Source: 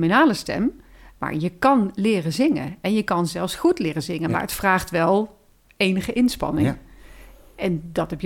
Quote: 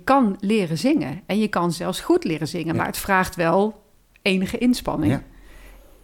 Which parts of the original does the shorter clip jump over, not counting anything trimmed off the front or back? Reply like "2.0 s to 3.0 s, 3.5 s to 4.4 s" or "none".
none